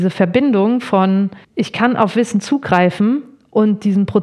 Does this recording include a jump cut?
yes; 1 cut; at 1.4 s

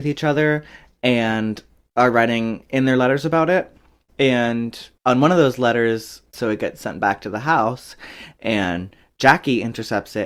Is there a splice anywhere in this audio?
yes; 1 cut; at 6.3 s

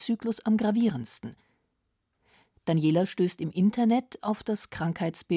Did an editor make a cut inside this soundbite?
no; 0 cuts

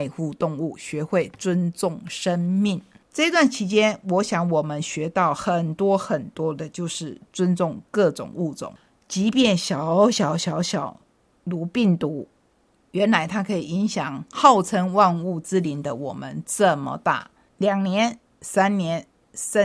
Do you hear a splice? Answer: no; 0 cuts

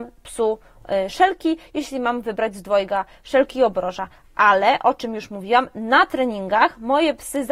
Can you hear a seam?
no; 0 cuts

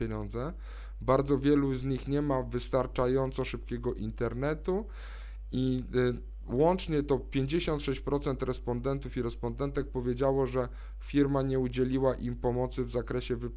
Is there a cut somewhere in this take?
no; 0 cuts

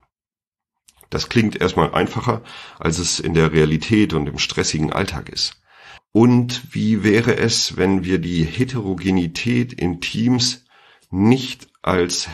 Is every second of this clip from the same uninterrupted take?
no; 1 cut; at 6.0 s

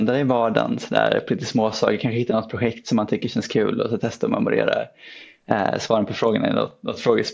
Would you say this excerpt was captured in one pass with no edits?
yes; 0 cuts

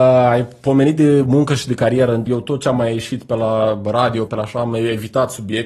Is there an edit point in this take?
yes; 2 cuts; at 2.3 s, 4.3 s

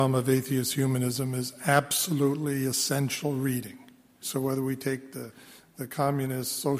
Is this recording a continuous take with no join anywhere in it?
no; 1 cut; at 4.2 s

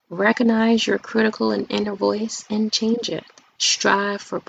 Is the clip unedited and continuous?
no; 1 cut; at 3.6 s

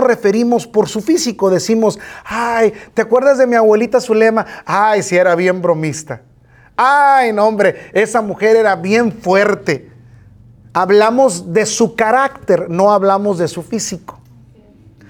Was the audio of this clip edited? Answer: no; 0 cuts

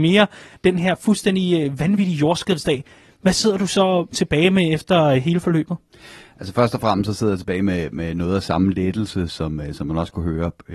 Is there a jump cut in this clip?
no; 0 cuts

